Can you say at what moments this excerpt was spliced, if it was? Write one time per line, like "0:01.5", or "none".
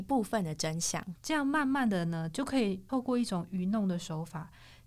0:01.2